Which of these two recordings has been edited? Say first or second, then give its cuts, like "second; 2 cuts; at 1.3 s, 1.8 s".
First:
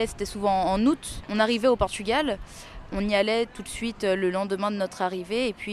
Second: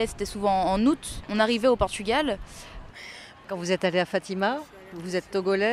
second; 1 cut; at 2.9 s